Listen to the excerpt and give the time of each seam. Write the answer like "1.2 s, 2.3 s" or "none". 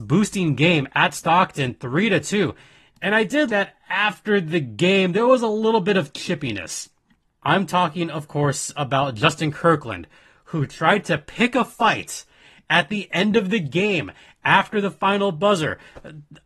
3.5 s, 7.3 s